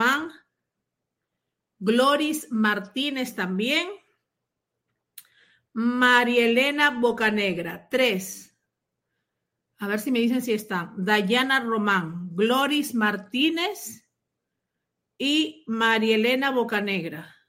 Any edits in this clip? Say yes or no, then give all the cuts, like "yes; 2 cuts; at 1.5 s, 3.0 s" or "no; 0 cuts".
no; 0 cuts